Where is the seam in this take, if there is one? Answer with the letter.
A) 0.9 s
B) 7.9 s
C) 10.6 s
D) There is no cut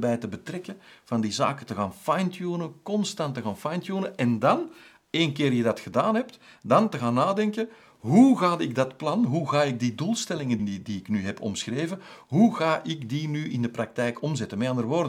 C